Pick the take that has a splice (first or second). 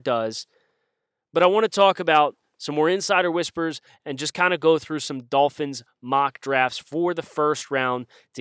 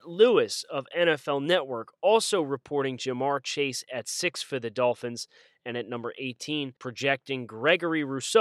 second